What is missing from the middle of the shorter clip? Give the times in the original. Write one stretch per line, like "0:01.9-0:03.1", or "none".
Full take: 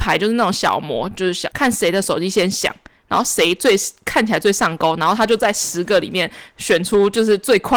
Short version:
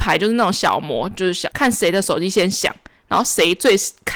none